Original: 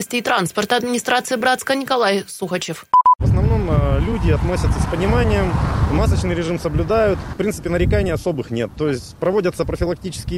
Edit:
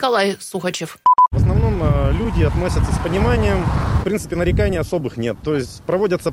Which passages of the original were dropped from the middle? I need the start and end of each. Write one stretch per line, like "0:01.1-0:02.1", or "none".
0:05.9-0:07.3